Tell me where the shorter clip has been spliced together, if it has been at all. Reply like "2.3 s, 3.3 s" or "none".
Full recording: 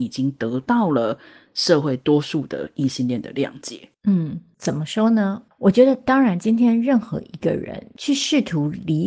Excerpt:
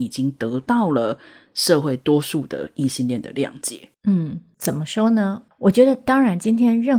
none